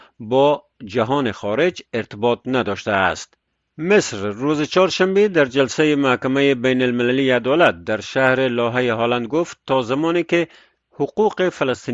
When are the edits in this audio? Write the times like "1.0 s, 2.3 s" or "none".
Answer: none